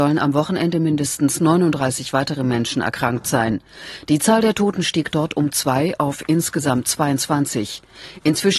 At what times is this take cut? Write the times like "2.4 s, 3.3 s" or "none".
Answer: none